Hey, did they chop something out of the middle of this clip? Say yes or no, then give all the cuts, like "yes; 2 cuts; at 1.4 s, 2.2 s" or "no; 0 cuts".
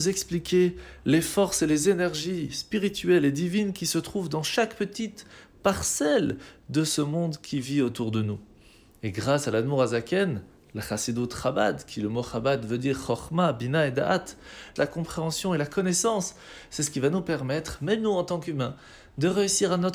yes; 1 cut; at 14.8 s